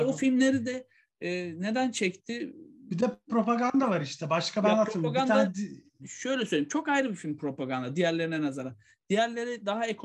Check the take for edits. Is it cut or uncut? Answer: uncut